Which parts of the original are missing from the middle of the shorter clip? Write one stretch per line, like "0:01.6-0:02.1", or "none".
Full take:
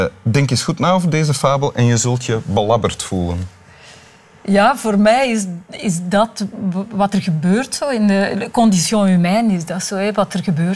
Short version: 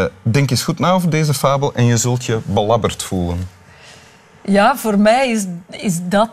none